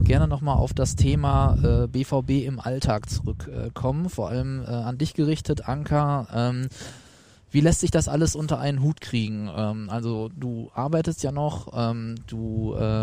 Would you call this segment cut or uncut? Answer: cut